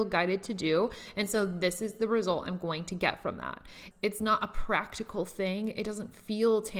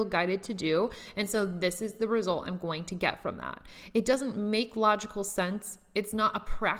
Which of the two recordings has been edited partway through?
first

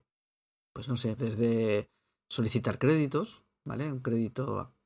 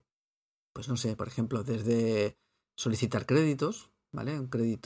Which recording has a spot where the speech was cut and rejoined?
first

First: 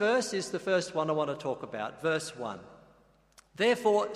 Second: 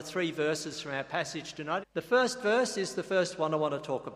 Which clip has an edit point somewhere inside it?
second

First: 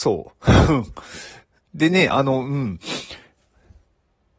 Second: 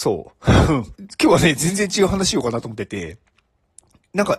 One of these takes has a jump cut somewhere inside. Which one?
second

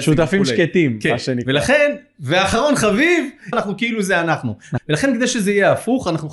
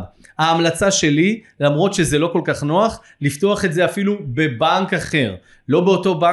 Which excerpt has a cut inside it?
first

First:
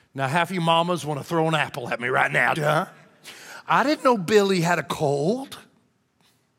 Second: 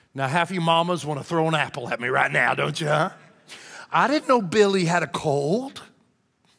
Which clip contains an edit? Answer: first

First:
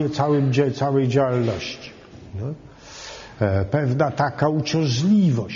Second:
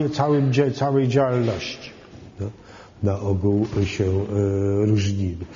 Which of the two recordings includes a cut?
second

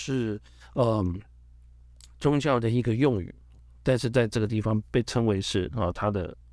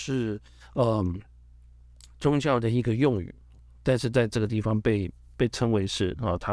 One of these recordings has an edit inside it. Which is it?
first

